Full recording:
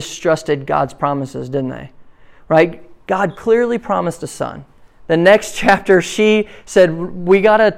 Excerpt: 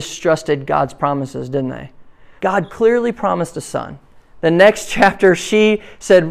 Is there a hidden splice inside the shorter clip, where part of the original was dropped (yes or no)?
yes